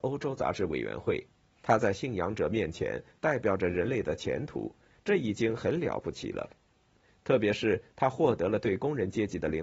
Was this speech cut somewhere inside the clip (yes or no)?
yes